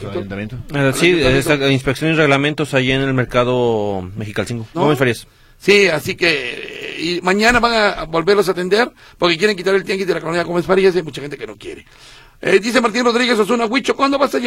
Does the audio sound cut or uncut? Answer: cut